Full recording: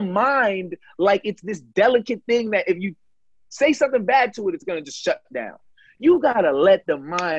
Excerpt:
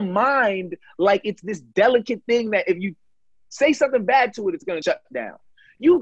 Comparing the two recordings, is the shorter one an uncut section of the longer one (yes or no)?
no